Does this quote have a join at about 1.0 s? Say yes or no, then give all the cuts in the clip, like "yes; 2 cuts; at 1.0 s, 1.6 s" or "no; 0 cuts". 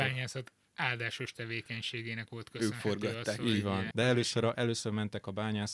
no; 1 cut; at 3.9 s